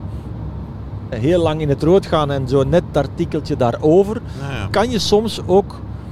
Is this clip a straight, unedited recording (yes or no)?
no